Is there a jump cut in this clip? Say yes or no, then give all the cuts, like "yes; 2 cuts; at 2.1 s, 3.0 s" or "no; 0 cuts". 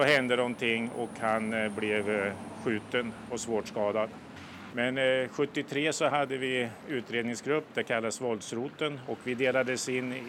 yes; 2 cuts; at 4.7 s, 9.1 s